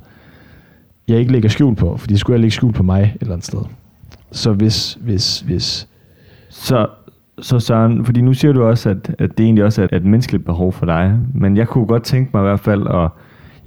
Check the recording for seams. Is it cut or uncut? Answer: cut